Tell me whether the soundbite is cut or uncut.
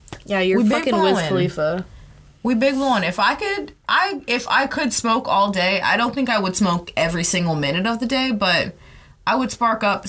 uncut